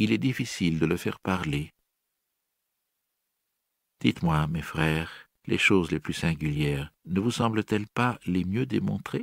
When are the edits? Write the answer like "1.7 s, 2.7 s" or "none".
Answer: 5.4 s, 7.0 s